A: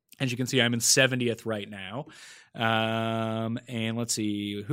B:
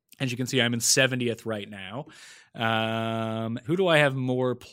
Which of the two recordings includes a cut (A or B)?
B